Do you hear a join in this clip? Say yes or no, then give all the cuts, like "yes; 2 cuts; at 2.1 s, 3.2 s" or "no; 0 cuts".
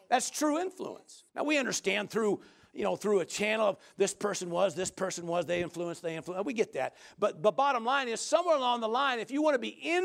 yes; 1 cut; at 1.3 s